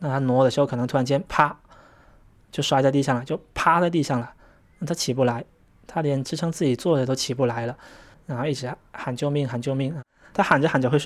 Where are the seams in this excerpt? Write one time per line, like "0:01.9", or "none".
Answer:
0:08.1